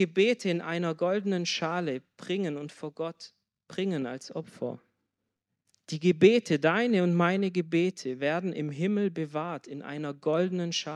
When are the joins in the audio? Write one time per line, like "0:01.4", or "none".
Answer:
none